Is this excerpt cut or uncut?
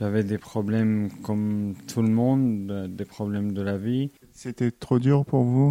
cut